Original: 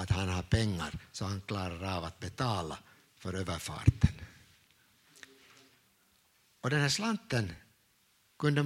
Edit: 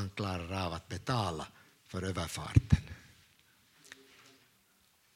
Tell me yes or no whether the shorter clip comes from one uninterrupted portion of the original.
yes